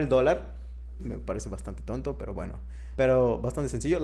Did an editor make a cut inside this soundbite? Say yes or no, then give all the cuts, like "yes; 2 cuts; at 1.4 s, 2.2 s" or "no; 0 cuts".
yes; 2 cuts; at 1.0 s, 3.0 s